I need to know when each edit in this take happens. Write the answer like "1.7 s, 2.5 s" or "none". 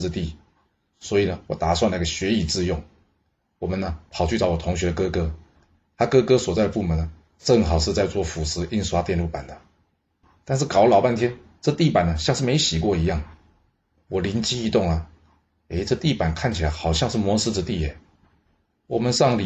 10.2 s